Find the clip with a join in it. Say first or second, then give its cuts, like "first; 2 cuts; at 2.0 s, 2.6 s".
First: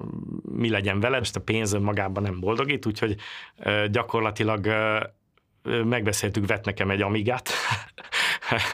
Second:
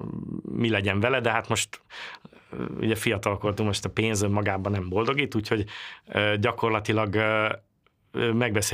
first; 1 cut; at 1.2 s